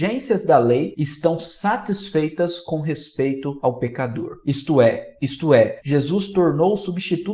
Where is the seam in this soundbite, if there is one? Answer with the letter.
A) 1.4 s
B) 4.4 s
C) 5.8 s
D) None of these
C